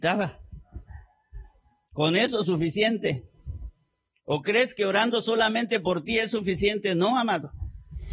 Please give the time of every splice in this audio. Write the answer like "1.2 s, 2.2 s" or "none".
1.9 s